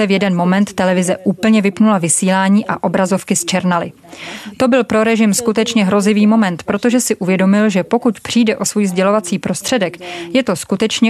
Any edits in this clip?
no; 0 cuts

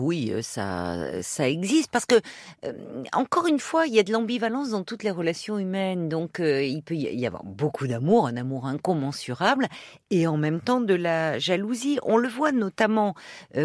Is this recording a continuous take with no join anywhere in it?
yes; 0 cuts

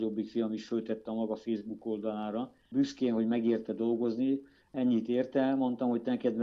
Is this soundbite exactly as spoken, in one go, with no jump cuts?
yes; 0 cuts

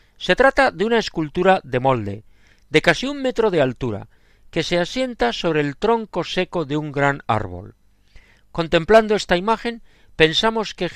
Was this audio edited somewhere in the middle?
no; 0 cuts

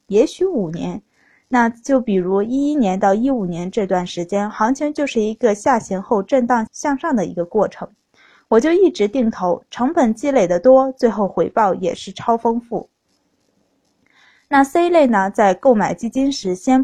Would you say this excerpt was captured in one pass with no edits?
no; 1 cut; at 6.7 s

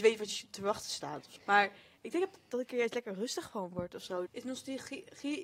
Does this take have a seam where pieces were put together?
yes; 2 cuts; at 1.4 s, 4.3 s

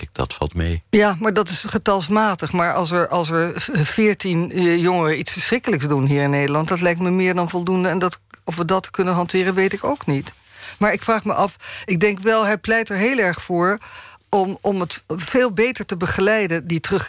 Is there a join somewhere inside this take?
no; 0 cuts

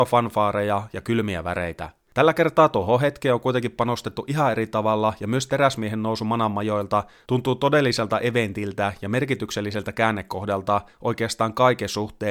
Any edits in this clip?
no; 0 cuts

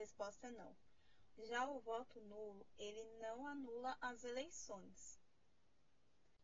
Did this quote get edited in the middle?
yes; 1 cut; at 1.4 s

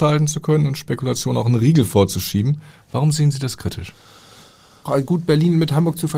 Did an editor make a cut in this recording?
yes; 1 cut; at 4.9 s

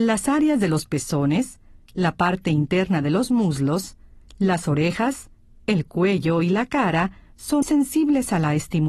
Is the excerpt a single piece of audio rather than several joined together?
no; 1 cut; at 7.6 s

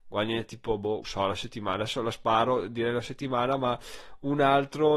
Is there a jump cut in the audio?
yes; 1 cut; at 1.0 s

